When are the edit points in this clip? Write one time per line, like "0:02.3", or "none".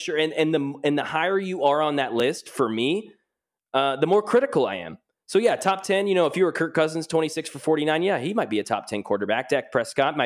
none